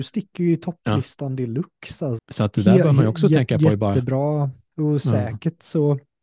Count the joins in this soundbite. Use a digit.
2